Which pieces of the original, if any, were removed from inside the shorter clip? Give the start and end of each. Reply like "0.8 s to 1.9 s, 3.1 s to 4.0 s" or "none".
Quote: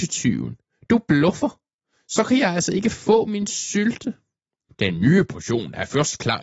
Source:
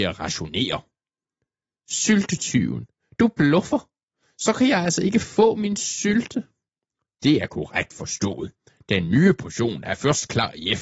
7.0 s to 8.8 s